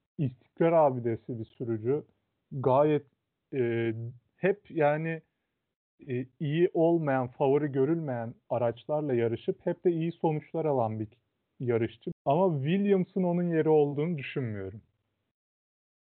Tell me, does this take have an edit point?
yes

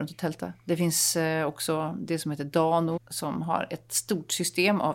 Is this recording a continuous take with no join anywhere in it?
no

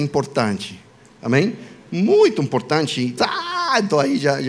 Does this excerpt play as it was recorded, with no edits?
no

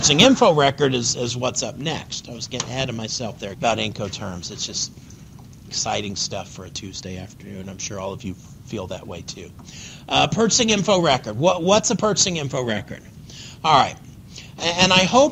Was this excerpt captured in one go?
no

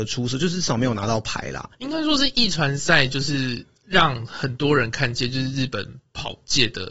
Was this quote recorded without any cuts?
no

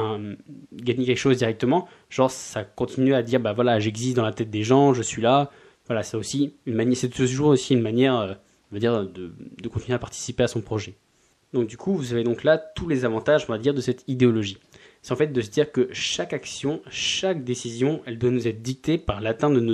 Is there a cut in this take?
no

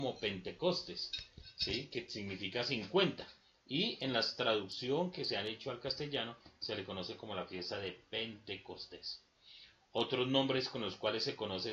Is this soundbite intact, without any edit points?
yes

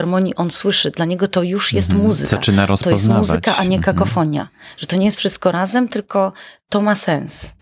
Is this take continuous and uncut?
yes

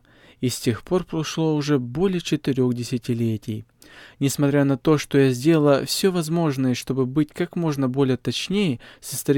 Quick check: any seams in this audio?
no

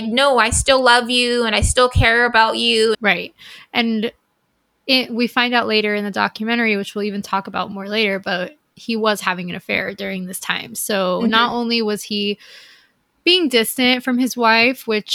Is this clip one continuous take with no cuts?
no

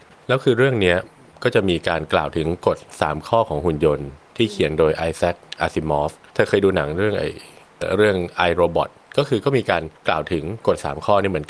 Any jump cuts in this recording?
yes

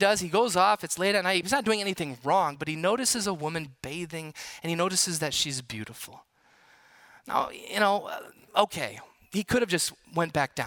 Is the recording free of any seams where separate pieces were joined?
no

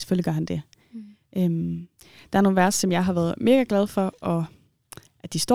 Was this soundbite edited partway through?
no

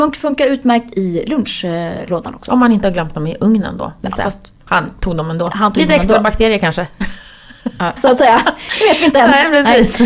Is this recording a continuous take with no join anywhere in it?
no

